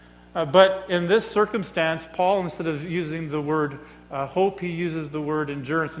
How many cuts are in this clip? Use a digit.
0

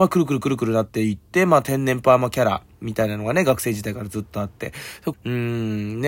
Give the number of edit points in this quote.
1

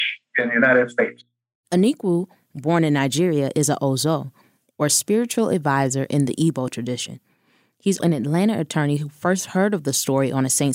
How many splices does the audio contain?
1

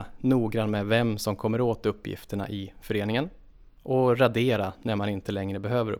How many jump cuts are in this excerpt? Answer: 0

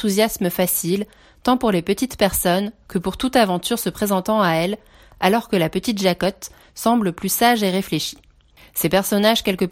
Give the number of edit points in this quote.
0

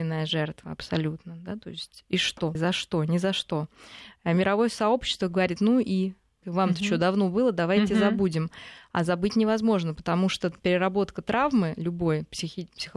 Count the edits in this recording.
2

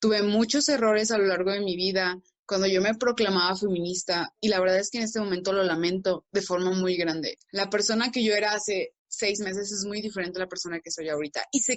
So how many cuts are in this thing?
1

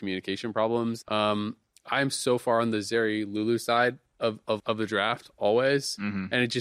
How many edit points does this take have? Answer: 2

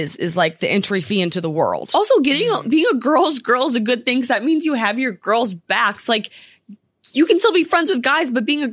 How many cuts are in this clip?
0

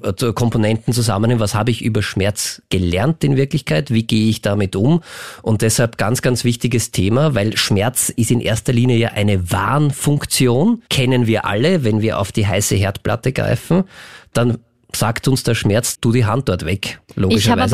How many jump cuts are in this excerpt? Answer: 2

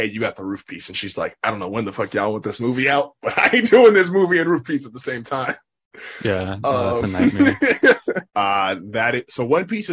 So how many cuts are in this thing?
1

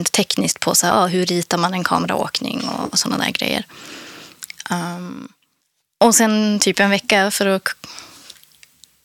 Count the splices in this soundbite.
0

